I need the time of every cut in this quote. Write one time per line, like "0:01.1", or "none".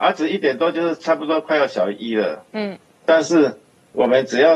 0:03.0